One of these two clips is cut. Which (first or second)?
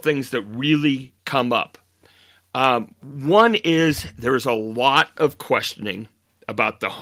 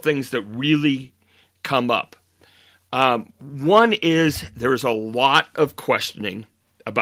first